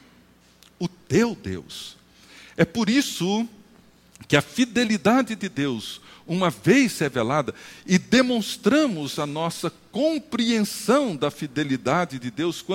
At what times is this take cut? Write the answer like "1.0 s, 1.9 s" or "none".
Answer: none